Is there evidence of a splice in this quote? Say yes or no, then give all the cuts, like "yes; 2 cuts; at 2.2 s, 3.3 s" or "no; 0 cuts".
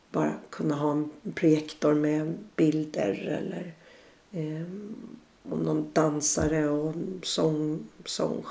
no; 0 cuts